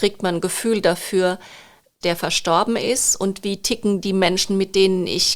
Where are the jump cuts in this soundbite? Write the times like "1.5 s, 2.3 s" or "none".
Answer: 2.0 s